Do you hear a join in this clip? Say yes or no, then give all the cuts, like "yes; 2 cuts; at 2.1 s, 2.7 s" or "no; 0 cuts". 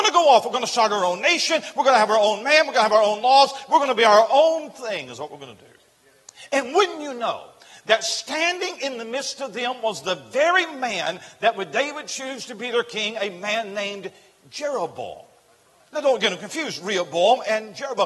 no; 0 cuts